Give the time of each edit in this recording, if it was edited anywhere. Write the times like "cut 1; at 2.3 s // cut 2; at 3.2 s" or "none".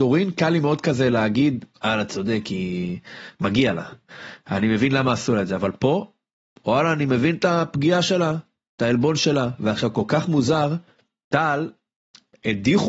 none

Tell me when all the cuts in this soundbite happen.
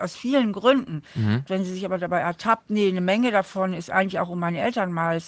cut 1; at 1.5 s

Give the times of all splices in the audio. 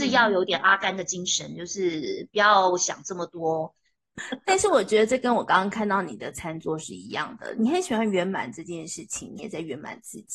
cut 1; at 4.2 s // cut 2; at 9.4 s

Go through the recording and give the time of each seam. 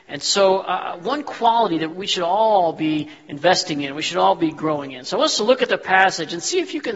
cut 1; at 1.9 s

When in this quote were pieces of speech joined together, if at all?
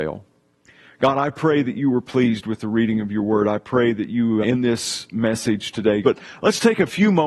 cut 1; at 4.4 s // cut 2; at 6.0 s

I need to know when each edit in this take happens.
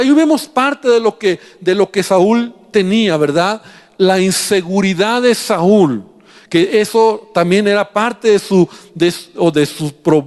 none

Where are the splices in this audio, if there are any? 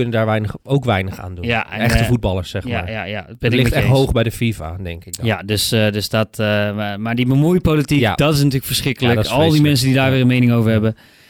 none

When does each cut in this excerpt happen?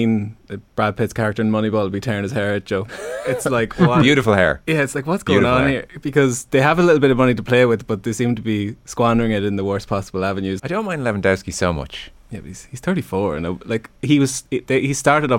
cut 1; at 10.6 s

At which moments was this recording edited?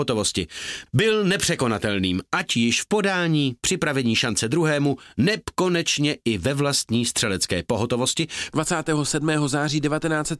cut 1; at 8.5 s

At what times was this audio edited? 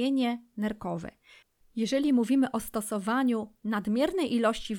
cut 1; at 1.6 s

